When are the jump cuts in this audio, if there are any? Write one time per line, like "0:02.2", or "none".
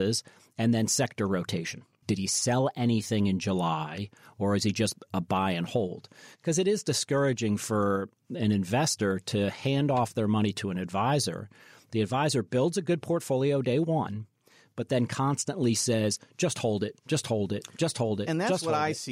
0:02.0